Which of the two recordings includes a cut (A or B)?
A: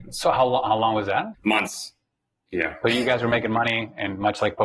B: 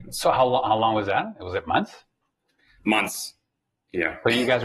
A